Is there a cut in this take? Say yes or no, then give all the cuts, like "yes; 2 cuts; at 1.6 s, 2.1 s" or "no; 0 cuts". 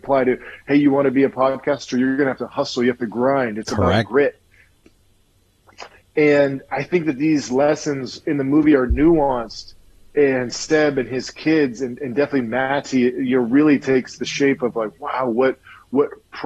no; 0 cuts